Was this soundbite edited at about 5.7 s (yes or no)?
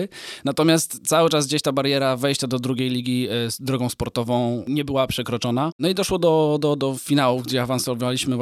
yes